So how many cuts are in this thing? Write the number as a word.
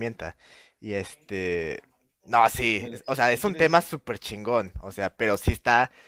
zero